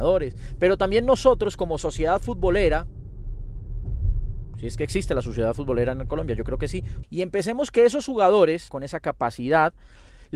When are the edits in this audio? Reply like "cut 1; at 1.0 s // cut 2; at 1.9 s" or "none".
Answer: cut 1; at 7.0 s // cut 2; at 8.7 s